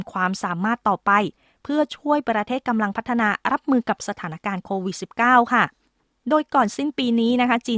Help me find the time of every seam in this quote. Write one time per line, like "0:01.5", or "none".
none